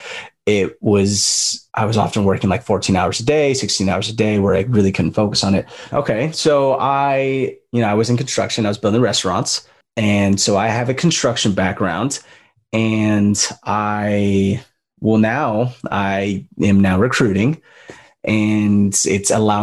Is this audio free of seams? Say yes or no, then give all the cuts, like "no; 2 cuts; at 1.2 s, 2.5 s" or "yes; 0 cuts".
no; 2 cuts; at 1.7 s, 5.9 s